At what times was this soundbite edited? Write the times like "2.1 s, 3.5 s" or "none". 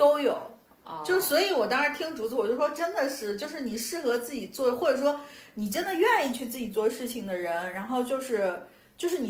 none